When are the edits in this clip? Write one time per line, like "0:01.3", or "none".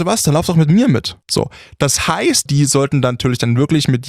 0:01.2
0:02.5